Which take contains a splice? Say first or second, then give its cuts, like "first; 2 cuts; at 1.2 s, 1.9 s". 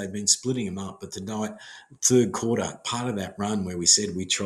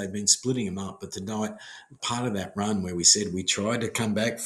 second; 1 cut; at 2.0 s